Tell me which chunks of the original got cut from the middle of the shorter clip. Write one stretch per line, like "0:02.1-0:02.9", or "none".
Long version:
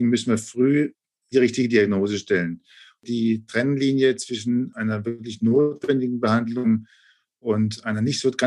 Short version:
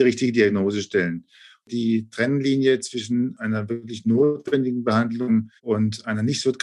0:06.9-0:07.4